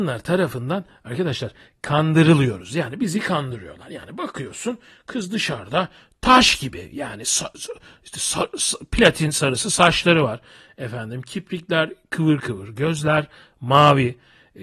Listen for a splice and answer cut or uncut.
uncut